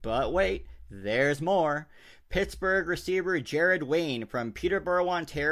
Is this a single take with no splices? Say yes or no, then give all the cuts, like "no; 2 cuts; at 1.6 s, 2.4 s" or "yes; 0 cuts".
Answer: yes; 0 cuts